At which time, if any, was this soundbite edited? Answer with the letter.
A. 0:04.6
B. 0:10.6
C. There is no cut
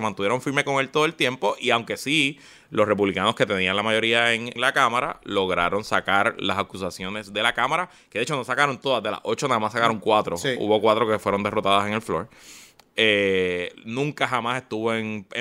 A